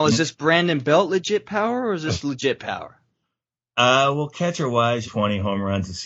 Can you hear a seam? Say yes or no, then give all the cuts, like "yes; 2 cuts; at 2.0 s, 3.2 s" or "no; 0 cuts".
yes; 1 cut; at 5.0 s